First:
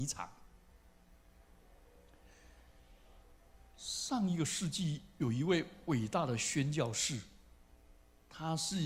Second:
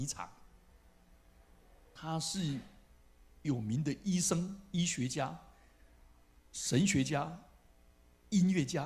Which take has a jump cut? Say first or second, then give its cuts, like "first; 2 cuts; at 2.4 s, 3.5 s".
second; 1 cut; at 2.0 s